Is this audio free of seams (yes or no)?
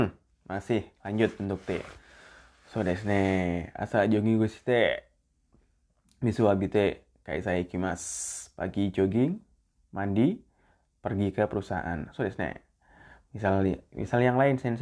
yes